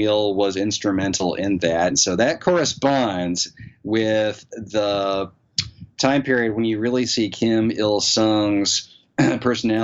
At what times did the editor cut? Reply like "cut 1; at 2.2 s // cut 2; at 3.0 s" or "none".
cut 1; at 1.9 s